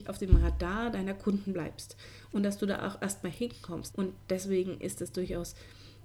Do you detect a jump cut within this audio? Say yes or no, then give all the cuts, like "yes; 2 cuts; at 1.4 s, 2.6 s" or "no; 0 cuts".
yes; 1 cut; at 3.9 s